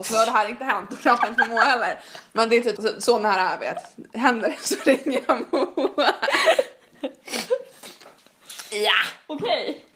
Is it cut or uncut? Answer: cut